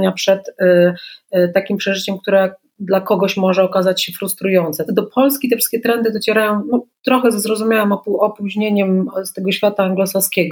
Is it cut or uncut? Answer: cut